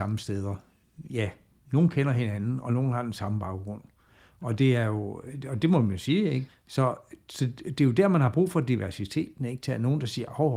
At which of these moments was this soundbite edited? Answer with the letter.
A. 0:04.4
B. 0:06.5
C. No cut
B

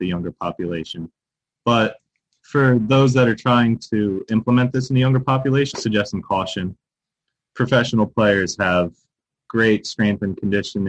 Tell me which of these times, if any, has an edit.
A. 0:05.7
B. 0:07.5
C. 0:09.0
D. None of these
A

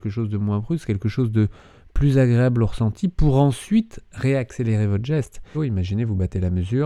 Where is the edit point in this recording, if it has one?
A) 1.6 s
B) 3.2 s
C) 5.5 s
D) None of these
C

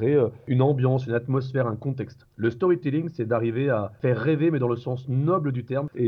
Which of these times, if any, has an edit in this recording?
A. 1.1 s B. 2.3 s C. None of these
C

